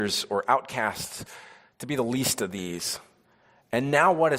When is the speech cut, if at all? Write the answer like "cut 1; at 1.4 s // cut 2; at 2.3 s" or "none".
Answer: none